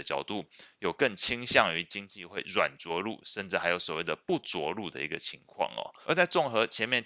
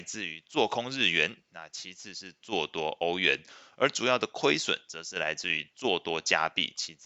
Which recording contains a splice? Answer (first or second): first